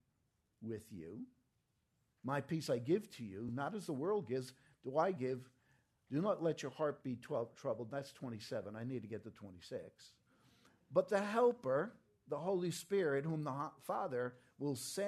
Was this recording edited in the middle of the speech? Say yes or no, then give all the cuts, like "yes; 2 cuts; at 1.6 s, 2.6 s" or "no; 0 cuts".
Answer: no; 0 cuts